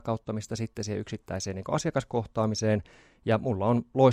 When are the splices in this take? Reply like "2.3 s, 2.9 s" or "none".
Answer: none